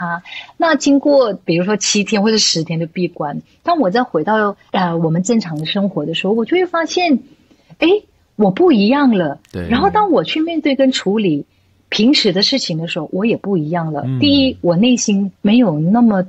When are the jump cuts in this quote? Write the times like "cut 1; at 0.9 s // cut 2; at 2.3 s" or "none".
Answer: cut 1; at 15.3 s